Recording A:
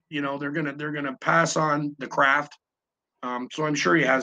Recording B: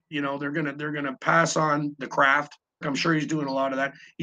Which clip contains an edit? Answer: B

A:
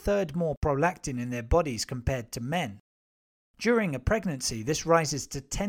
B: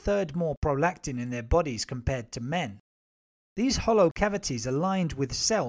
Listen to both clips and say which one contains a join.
B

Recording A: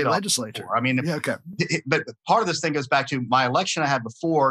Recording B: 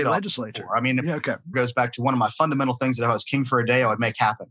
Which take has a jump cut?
B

